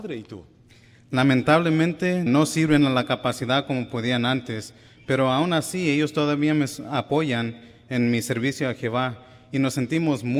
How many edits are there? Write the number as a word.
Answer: one